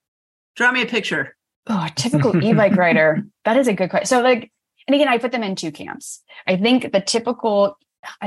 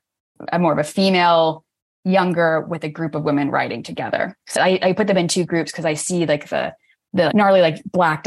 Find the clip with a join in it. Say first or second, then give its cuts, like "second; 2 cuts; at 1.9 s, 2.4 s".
second; 2 cuts; at 4.5 s, 7.3 s